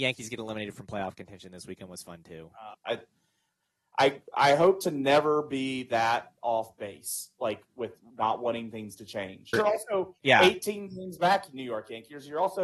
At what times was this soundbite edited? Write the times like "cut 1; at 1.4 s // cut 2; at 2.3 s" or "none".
cut 1; at 2.7 s // cut 2; at 9.5 s